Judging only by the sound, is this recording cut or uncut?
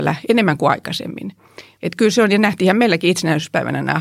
cut